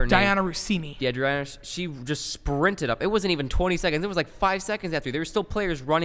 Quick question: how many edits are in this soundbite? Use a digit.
0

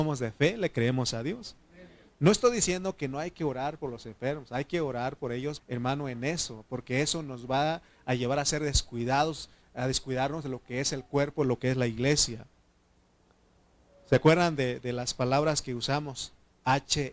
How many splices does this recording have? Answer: 1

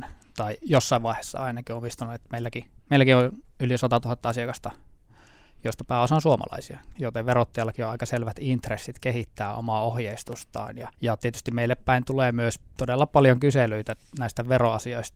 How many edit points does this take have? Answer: 3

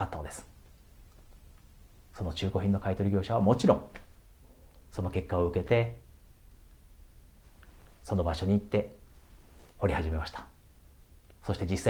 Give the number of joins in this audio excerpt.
0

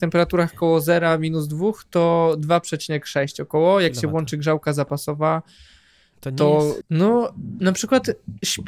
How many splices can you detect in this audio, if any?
1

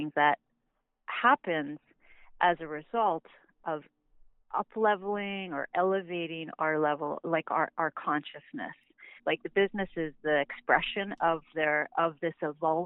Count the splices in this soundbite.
2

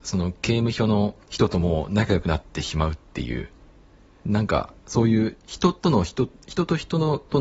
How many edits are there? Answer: 1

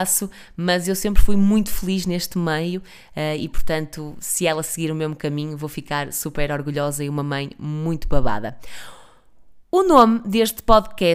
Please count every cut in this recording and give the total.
0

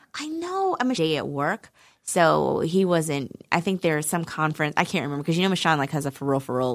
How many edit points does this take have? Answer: 1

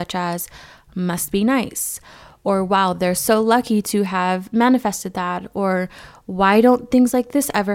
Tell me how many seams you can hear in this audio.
0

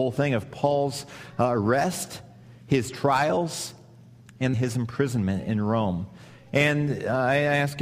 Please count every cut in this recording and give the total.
1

